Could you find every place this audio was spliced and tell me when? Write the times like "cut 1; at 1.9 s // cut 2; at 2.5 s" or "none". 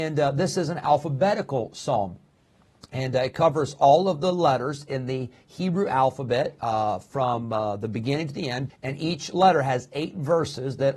cut 1; at 8.7 s